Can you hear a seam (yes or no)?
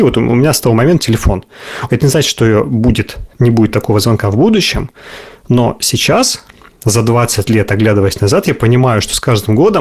yes